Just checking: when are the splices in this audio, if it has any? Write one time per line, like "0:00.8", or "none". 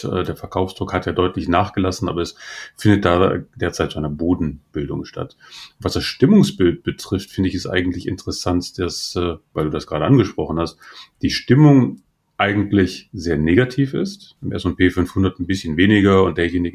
0:14.4